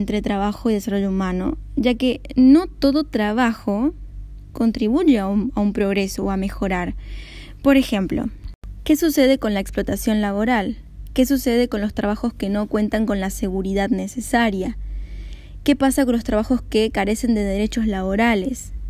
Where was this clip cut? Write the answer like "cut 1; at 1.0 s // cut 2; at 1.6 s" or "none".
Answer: none